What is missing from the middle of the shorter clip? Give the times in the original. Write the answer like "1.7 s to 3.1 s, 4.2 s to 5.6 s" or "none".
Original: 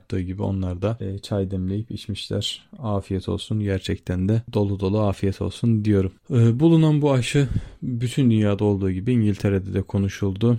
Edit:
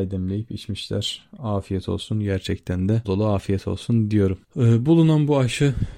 4.4 s to 4.8 s